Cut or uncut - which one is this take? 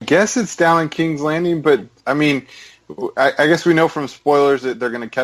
uncut